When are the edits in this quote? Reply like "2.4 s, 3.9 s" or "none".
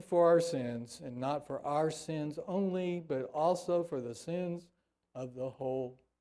none